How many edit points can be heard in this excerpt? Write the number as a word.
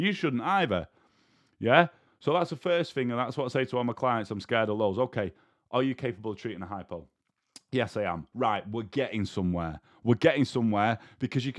zero